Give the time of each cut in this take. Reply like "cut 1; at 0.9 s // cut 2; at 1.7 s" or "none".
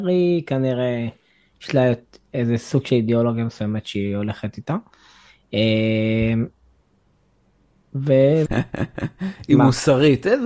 cut 1; at 8.5 s